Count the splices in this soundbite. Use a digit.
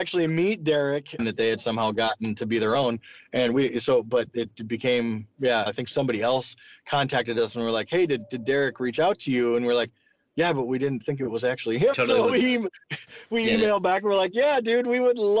3